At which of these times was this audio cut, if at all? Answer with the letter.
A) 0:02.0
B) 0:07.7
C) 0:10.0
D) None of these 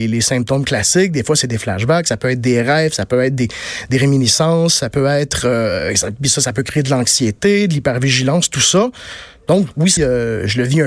C